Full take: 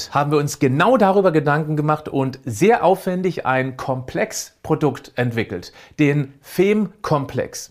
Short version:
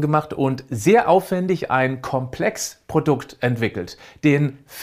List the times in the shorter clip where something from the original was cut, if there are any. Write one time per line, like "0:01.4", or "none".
none